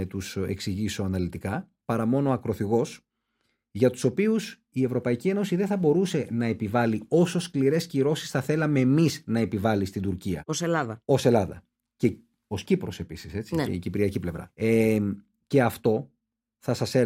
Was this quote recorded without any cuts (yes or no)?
yes